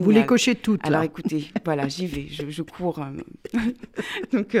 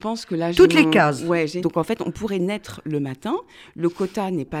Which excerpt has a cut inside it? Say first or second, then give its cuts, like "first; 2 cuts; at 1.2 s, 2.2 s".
second; 1 cut; at 1.6 s